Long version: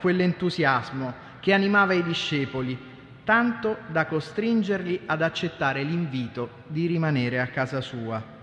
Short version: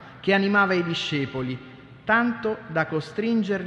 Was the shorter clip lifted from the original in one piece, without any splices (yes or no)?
yes